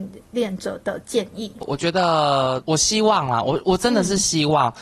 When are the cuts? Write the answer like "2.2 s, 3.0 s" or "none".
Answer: none